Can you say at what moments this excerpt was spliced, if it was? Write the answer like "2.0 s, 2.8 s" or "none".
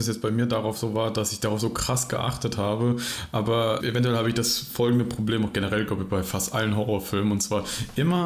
3.8 s